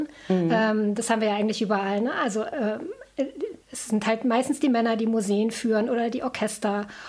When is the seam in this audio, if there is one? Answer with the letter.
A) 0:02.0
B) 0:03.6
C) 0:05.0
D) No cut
B